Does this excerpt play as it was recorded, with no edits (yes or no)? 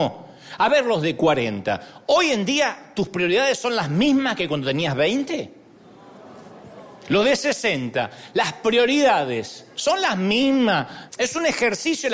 no